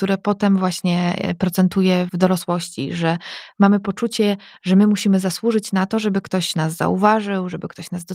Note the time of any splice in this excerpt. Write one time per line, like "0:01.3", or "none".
0:02.1